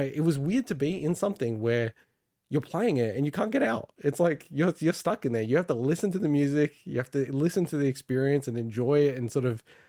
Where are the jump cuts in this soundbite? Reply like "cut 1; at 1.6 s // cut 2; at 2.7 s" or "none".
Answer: none

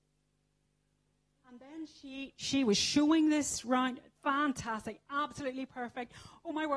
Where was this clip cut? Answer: none

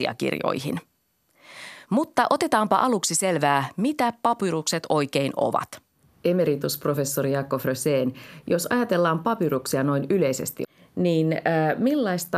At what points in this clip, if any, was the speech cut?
none

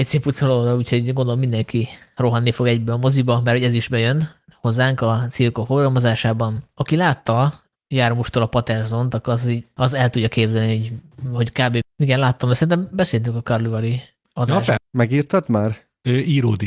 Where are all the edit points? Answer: cut 1; at 11.8 s // cut 2; at 14.8 s

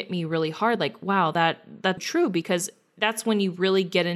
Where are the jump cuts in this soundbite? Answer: cut 1; at 2.0 s

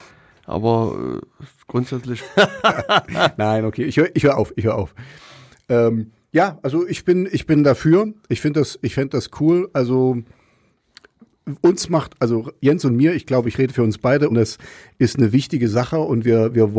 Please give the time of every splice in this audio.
cut 1; at 2.2 s // cut 2; at 14.3 s

